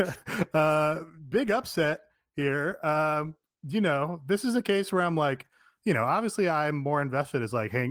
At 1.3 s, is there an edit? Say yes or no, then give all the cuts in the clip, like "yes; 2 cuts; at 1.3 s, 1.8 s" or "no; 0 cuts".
yes; 1 cut; at 1.3 s